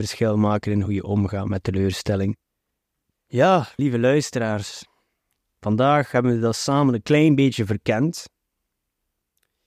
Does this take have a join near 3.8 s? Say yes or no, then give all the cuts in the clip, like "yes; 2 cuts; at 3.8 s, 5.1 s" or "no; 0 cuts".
yes; 1 cut; at 3.8 s